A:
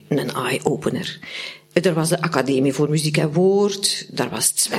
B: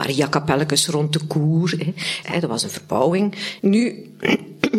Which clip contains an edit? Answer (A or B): B